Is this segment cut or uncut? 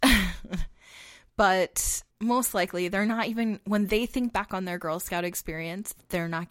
cut